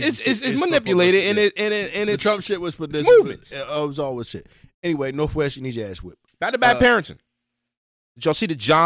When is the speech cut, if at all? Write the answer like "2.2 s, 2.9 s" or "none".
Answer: none